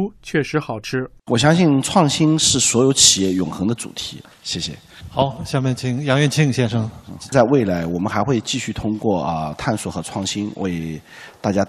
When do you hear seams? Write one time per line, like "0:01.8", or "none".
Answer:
0:01.2
0:04.3
0:07.3